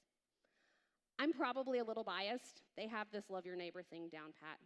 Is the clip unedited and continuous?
no; 1 cut; at 2.7 s

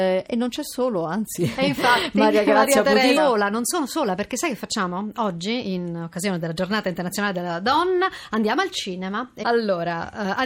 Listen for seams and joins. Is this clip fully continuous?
no; 2 cuts; at 3.2 s, 9.4 s

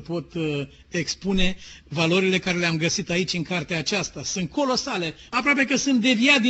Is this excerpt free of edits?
no; 1 cut; at 5.3 s

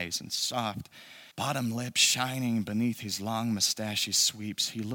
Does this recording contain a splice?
yes; 1 cut; at 1.3 s

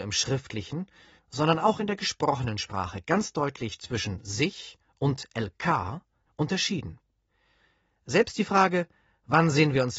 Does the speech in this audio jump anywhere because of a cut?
yes; 1 cut; at 6.3 s

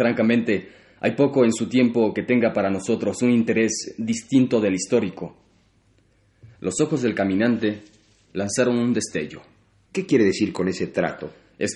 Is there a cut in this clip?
yes; 1 cut; at 9.9 s

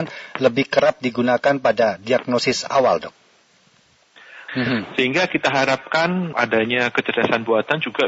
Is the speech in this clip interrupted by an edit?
yes; 2 cuts; at 4.5 s, 6.3 s

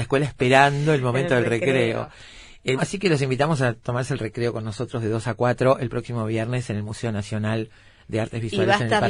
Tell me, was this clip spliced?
yes; 1 cut; at 2.8 s

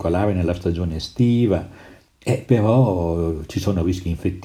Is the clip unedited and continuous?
yes; 0 cuts

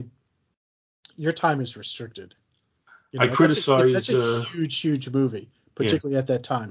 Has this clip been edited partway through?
no; 0 cuts

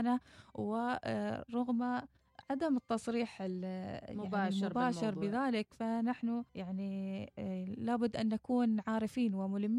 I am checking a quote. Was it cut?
yes; 1 cut; at 6.5 s

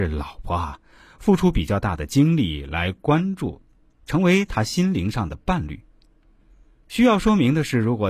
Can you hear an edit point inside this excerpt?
no; 0 cuts

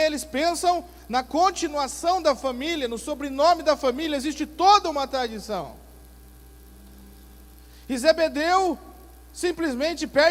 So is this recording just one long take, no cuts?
yes; 0 cuts

